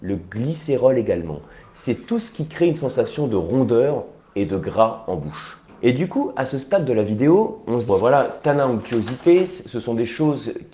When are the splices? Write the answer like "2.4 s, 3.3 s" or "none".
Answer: 7.9 s